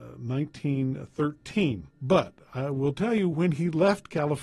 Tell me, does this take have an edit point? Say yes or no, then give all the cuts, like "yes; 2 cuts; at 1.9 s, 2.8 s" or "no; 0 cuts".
yes; 1 cut; at 1.9 s